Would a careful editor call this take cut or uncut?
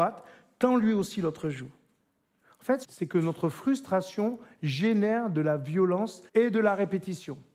cut